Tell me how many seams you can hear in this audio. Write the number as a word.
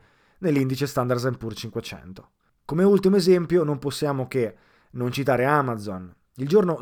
one